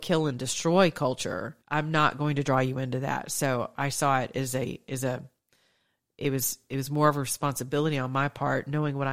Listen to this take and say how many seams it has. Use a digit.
1